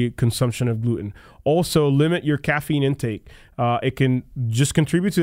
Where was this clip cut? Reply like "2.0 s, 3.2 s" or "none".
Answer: none